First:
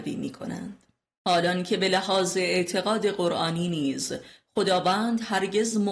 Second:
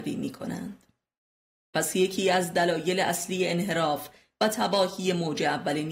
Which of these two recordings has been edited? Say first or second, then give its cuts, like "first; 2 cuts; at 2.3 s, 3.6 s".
first; 1 cut; at 1.2 s